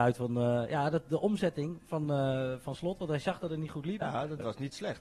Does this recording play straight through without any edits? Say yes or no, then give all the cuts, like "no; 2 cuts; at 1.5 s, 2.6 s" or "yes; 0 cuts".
no; 1 cut; at 4.0 s